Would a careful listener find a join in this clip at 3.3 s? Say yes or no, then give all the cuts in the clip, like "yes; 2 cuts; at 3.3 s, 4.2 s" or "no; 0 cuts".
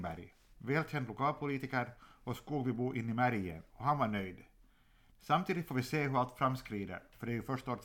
no; 1 cut; at 5.1 s